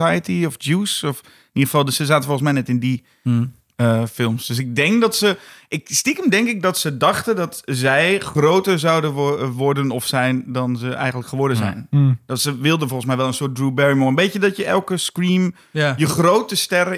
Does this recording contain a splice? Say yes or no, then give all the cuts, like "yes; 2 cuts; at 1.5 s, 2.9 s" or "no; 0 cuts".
no; 0 cuts